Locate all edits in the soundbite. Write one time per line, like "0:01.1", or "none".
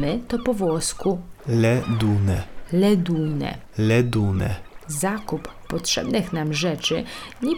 0:01.4

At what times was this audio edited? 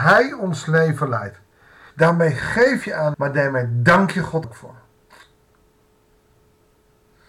0:01.9
0:03.1
0:04.4

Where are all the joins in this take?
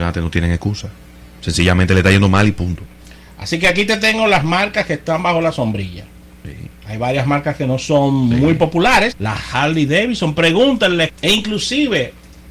0:06.3
0:09.1
0:11.1

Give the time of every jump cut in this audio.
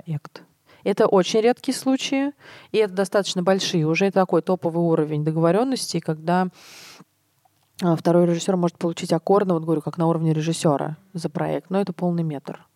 none

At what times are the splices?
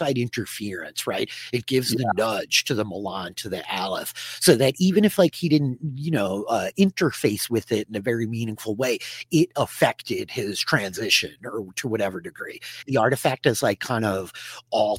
0:12.8

